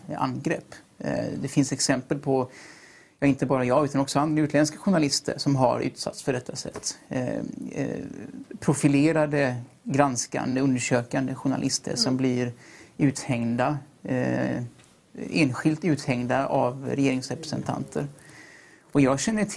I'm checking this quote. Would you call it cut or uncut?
uncut